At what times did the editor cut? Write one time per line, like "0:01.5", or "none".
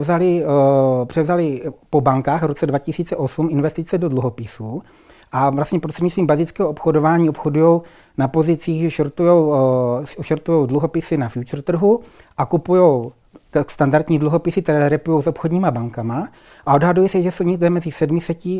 none